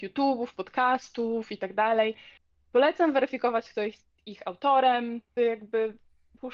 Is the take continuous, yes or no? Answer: no